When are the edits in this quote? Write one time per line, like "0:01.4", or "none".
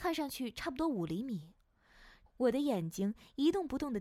0:02.3